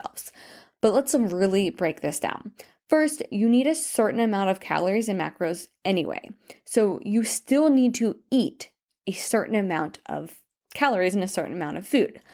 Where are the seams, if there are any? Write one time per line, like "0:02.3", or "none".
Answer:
none